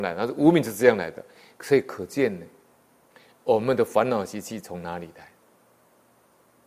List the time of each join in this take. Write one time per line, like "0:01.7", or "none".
none